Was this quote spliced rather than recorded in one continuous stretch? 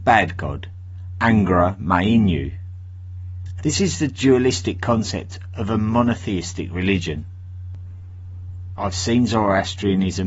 yes; 2 cuts; at 3.6 s, 8.7 s

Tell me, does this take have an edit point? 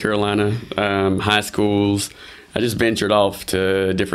no; 0 cuts

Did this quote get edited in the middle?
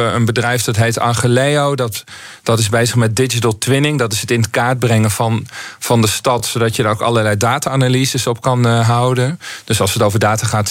no; 0 cuts

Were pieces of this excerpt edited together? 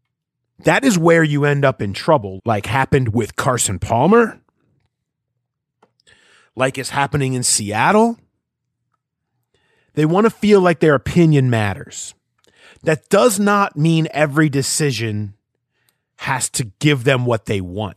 yes; 1 cut; at 2.4 s

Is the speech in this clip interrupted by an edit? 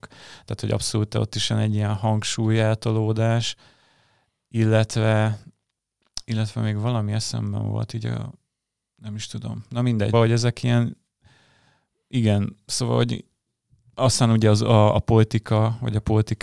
yes; 1 cut; at 10.1 s

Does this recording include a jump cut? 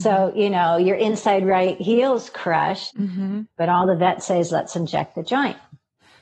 yes; 1 cut; at 2.9 s

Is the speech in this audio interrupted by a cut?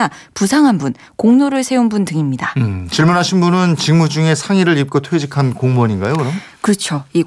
no; 0 cuts

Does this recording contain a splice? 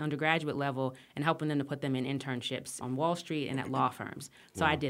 yes; 1 cut; at 2.8 s

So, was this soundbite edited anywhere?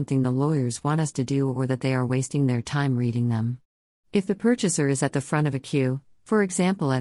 no; 0 cuts

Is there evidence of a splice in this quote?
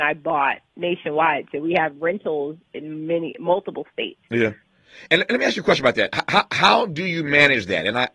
yes; 1 cut; at 5.1 s

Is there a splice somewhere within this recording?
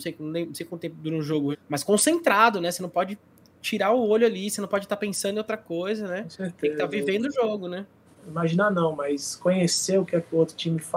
yes; 2 cuts; at 1.5 s, 8.1 s

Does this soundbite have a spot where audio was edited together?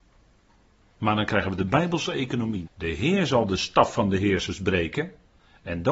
yes; 1 cut; at 2.7 s

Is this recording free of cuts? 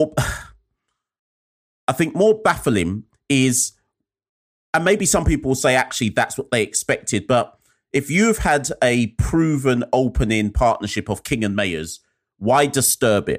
yes; 0 cuts

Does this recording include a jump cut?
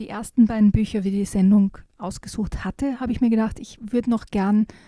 no; 0 cuts

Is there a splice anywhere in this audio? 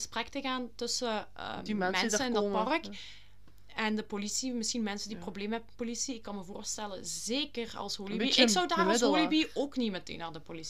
no; 0 cuts

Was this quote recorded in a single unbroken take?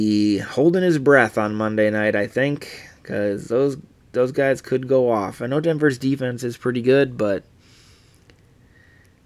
yes; 0 cuts

